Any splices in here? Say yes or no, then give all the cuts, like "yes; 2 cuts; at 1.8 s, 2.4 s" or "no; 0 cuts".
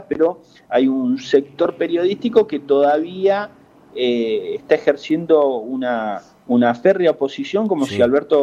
no; 0 cuts